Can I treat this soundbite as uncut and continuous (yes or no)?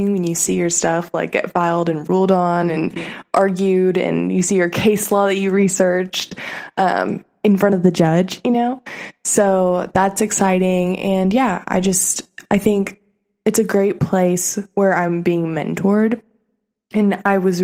yes